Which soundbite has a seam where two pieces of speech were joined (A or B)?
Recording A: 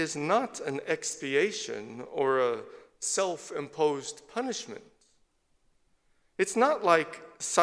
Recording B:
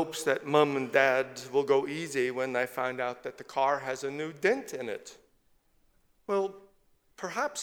B